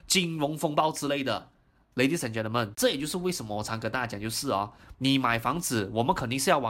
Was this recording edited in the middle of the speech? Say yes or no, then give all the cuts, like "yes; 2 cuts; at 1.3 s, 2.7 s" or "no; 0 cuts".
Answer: no; 0 cuts